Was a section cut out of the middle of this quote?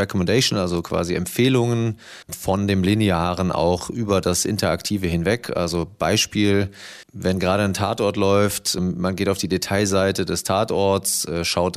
yes; 2 cuts; at 2.2 s, 7.0 s

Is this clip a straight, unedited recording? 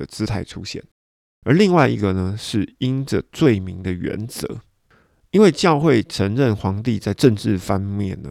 yes; 0 cuts

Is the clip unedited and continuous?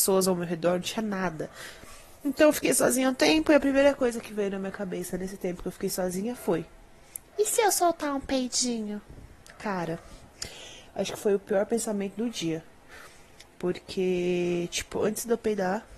yes; 0 cuts

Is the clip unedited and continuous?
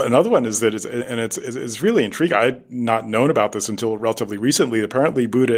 yes; 0 cuts

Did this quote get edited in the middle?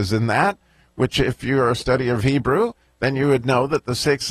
no; 0 cuts

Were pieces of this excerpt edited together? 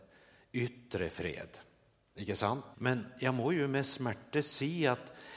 yes; 1 cut; at 2.7 s

